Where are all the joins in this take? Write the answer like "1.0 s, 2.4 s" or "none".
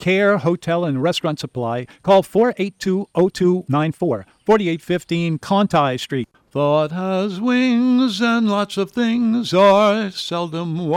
6.3 s

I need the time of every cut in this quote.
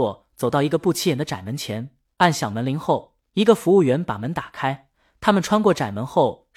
none

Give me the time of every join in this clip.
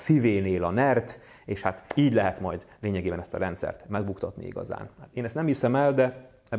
none

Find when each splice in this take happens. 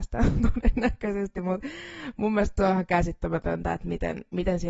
none

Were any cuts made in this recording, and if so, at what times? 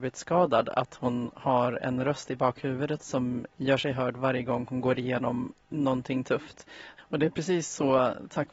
3.5 s, 7.0 s

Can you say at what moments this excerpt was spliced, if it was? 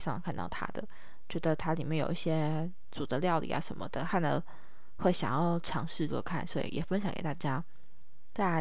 4.1 s, 6.1 s

